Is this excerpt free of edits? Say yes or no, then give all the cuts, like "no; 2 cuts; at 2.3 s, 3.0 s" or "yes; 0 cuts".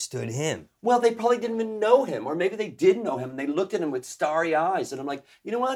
yes; 0 cuts